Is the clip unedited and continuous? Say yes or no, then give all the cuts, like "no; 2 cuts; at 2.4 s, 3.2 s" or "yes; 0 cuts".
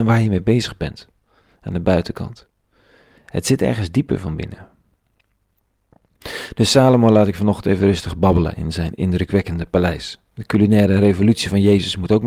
yes; 0 cuts